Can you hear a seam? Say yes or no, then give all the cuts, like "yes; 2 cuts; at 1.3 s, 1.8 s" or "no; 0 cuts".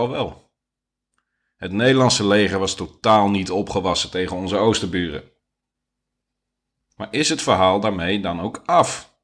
no; 0 cuts